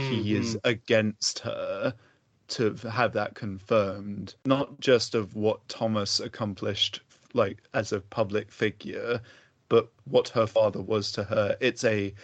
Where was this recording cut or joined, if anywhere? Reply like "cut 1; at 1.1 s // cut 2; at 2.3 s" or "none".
cut 1; at 4.4 s